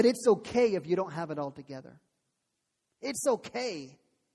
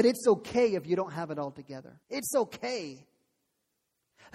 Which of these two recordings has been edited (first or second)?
second